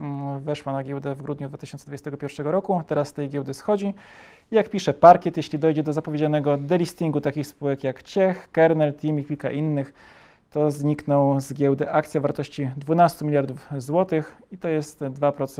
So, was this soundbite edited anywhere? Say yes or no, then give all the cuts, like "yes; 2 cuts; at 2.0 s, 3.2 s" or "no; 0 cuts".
no; 0 cuts